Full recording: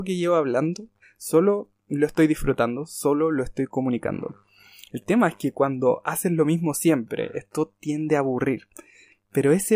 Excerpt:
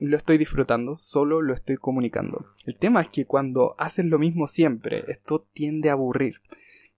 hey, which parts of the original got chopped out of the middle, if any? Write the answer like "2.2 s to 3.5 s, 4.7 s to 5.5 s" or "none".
4.5 s to 4.8 s